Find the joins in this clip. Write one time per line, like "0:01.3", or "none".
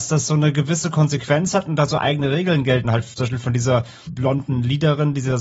0:02.8
0:04.1